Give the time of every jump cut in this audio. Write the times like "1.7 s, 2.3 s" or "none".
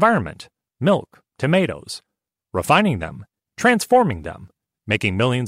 3.4 s